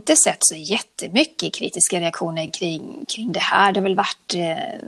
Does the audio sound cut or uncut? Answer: uncut